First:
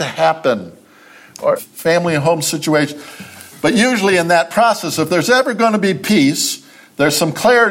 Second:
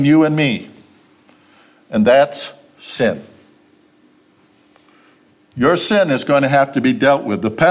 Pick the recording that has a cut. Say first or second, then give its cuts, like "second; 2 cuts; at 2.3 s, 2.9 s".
first; 1 cut; at 1.6 s